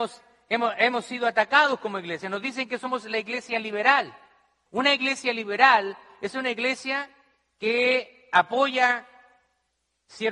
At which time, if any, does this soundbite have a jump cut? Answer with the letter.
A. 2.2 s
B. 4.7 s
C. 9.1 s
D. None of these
B